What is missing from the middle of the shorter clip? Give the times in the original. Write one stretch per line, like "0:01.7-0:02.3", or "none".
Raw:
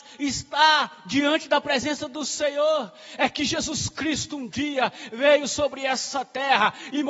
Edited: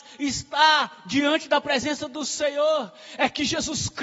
none